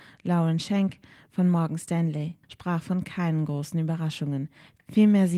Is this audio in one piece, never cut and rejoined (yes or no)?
no